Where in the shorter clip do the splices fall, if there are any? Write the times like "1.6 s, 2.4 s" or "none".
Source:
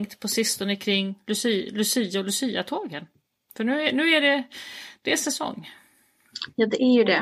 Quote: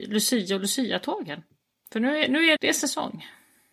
2.6 s